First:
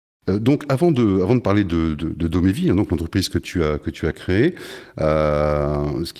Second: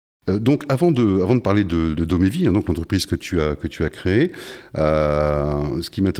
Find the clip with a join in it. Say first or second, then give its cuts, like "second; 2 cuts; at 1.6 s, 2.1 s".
second; 1 cut; at 2.0 s